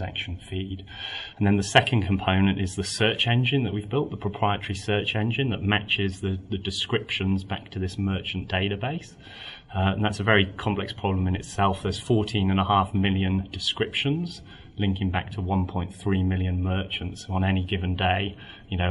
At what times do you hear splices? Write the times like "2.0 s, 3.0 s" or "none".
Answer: 1.3 s